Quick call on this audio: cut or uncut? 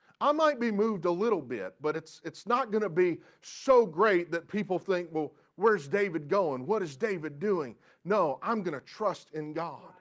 uncut